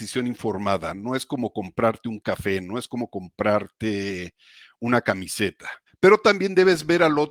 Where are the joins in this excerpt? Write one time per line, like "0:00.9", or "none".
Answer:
0:05.9